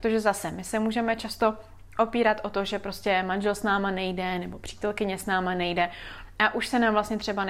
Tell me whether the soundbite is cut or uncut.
uncut